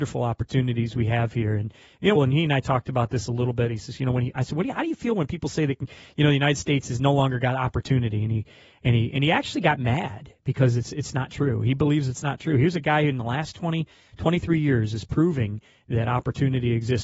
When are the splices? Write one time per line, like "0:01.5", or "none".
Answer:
0:02.1